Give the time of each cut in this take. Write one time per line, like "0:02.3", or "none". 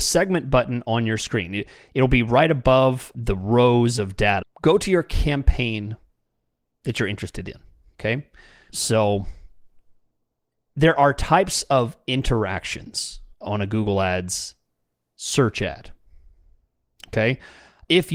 0:04.4
0:08.7
0:13.3